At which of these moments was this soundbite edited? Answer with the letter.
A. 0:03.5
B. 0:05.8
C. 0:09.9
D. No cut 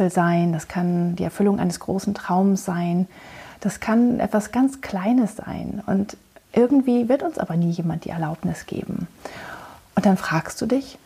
C